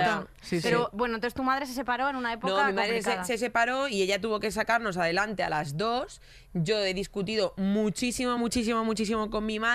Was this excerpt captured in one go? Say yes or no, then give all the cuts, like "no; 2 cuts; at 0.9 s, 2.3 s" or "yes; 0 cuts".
yes; 0 cuts